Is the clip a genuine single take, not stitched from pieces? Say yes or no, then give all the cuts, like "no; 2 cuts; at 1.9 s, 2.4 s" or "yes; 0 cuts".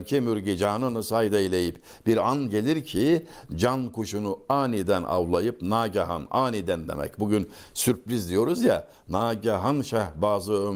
yes; 0 cuts